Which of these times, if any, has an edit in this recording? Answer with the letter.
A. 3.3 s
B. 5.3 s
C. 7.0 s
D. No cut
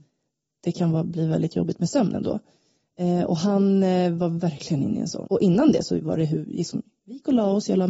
B